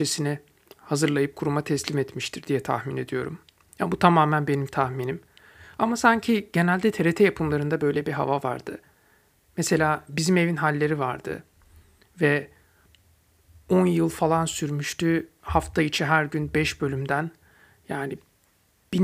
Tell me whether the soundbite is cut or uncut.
uncut